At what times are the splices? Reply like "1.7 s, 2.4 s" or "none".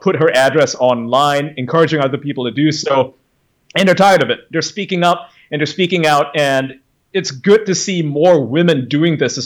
none